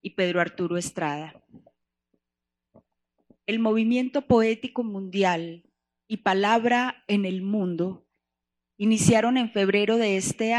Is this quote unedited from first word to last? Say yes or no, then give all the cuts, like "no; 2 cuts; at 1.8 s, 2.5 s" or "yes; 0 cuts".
yes; 0 cuts